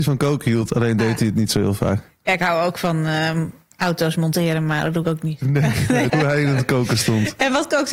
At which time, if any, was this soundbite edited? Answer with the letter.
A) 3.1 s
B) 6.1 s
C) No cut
B